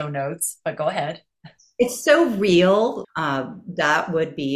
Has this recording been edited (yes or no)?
yes